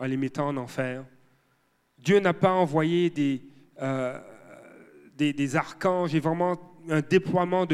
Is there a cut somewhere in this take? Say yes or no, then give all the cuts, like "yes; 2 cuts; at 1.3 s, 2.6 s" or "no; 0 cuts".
no; 0 cuts